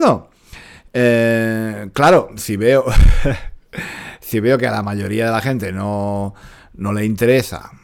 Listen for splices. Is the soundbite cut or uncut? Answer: uncut